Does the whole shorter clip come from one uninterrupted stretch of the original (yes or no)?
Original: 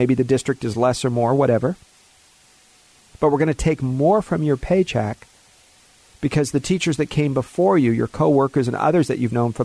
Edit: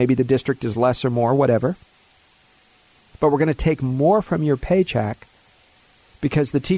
yes